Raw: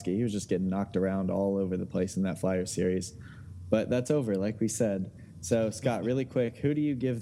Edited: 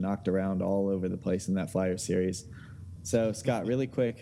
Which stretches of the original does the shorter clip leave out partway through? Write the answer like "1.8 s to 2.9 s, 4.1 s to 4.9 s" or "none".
3.6 s to 5.3 s